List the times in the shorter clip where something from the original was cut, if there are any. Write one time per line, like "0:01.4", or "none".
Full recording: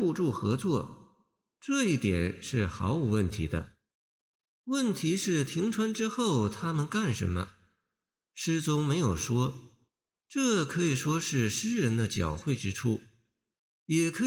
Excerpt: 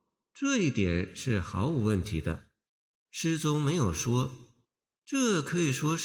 0:03.0